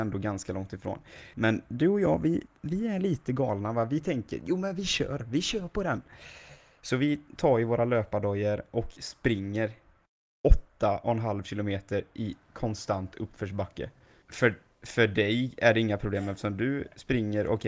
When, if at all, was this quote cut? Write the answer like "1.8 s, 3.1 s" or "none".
1.3 s, 14.2 s